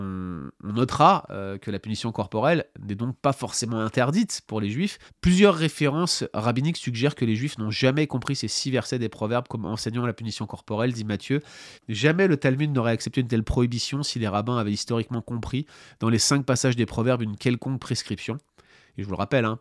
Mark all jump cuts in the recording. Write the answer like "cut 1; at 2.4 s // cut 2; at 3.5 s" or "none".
cut 1; at 5.1 s // cut 2; at 11.8 s

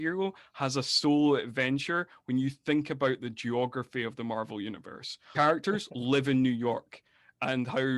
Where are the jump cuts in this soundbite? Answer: cut 1; at 5.3 s

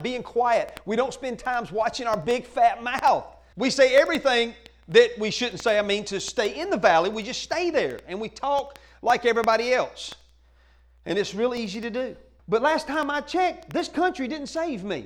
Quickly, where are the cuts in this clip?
cut 1; at 3.5 s // cut 2; at 12.4 s

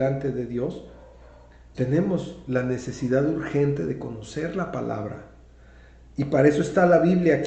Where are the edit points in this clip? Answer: cut 1; at 1.7 s

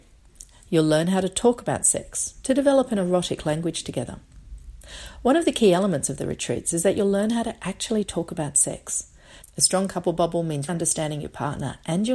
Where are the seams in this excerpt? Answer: cut 1; at 9.4 s // cut 2; at 10.7 s

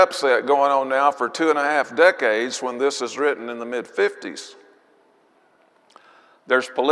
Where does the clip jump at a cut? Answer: none

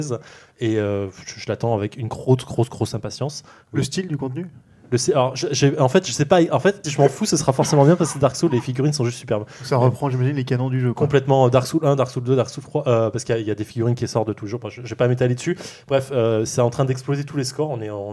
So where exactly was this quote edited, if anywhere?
cut 1; at 6.8 s

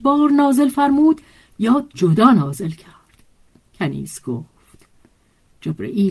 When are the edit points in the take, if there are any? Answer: cut 1; at 1.9 s

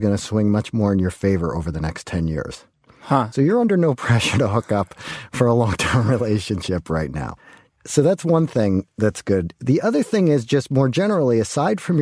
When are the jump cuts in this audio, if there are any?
none

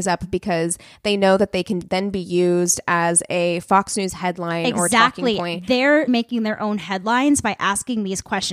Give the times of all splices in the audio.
cut 1; at 6.1 s

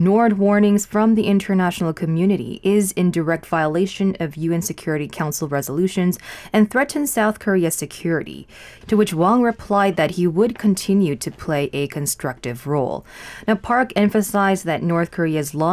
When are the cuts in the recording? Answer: cut 1; at 8.8 s

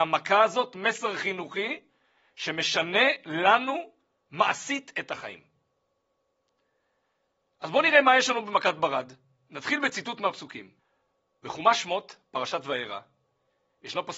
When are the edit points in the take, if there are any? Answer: none

